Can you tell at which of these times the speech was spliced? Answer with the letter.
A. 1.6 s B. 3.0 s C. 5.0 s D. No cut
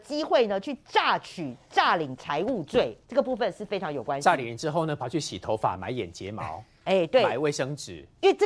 B